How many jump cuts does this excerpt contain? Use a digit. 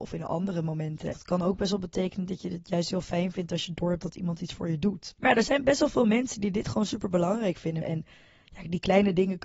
3